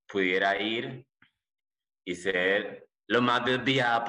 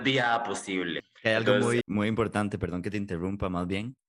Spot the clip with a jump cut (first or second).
second